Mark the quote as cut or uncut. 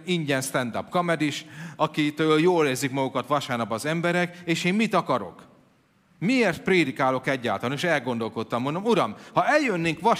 uncut